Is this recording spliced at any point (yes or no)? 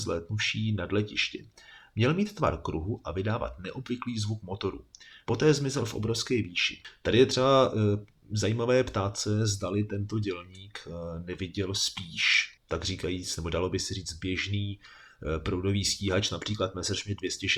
yes